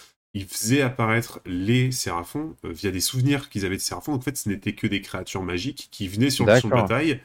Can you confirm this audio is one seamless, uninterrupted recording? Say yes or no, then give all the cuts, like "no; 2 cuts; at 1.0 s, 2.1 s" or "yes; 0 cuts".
yes; 0 cuts